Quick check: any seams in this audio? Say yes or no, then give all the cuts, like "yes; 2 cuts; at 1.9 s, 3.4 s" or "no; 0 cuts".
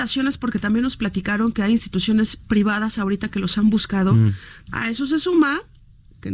yes; 1 cut; at 4.7 s